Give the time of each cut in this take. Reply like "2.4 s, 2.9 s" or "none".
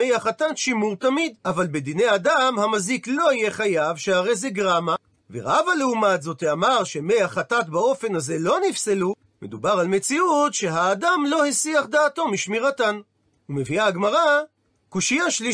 1.4 s